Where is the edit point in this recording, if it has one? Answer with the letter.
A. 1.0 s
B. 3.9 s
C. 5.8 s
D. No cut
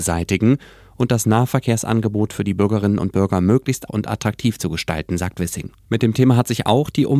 B